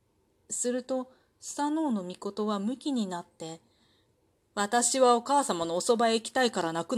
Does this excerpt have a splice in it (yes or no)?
no